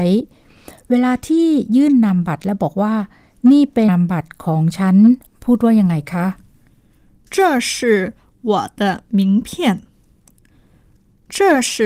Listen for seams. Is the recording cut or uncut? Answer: cut